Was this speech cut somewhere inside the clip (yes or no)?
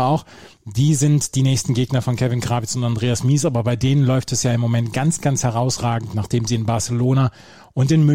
no